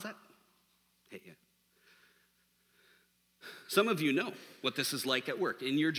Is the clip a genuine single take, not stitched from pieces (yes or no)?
yes